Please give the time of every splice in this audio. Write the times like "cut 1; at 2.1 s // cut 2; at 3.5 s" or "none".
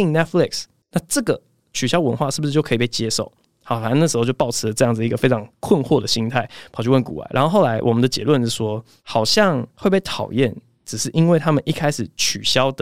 none